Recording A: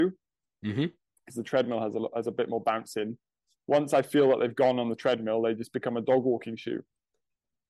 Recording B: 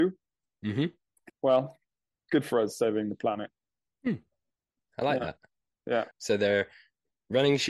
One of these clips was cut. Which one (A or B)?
B